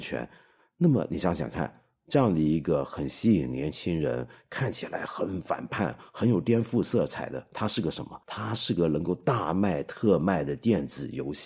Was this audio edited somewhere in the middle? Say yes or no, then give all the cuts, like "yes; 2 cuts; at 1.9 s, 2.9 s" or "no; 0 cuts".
yes; 1 cut; at 8.2 s